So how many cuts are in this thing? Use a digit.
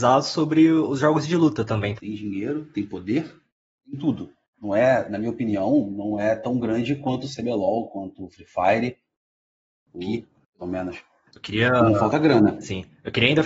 1